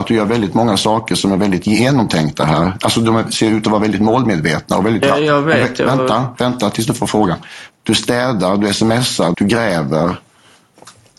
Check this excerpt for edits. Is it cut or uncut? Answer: cut